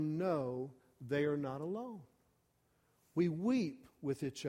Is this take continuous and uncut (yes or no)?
yes